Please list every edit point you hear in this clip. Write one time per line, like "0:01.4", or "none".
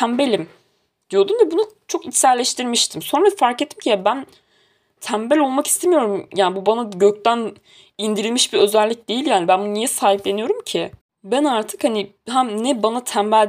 none